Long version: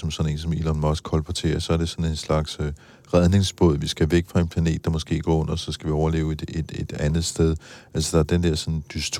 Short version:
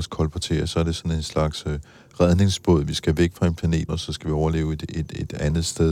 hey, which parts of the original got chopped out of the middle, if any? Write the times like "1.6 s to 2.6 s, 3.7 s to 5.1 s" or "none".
4.8 s to 5.5 s